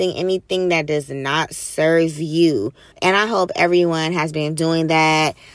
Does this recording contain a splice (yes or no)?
yes